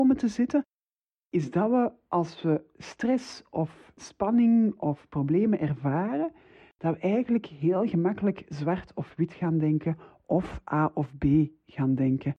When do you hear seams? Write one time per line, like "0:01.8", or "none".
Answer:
none